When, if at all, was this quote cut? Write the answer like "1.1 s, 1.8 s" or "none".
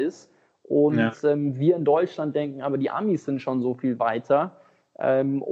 none